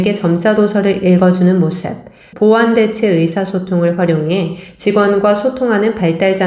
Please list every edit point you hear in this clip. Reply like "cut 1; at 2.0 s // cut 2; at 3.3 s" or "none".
cut 1; at 2.3 s